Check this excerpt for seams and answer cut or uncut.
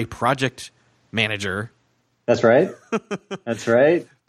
uncut